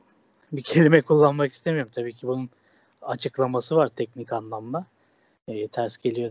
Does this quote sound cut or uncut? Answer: uncut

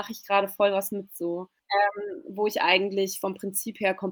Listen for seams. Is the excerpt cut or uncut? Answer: cut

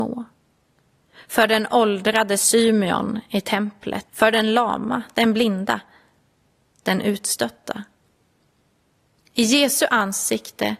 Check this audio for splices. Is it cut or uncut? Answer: cut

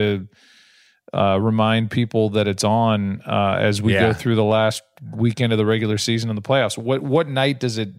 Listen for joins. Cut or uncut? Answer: uncut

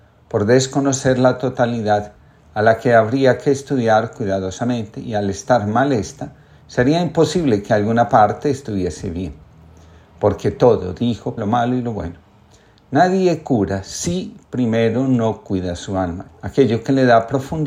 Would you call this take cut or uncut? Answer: cut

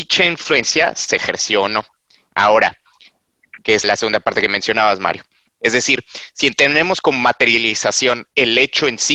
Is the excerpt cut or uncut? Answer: cut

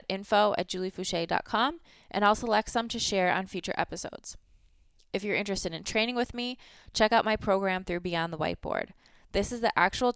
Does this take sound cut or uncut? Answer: uncut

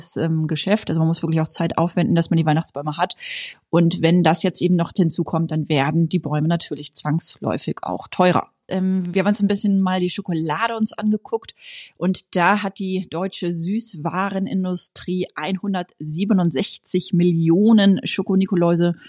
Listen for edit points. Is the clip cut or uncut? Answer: cut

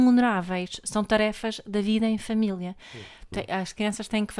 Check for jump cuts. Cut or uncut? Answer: cut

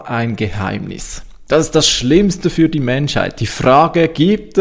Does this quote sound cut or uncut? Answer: uncut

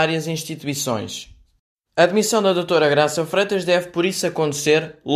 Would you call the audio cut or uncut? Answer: uncut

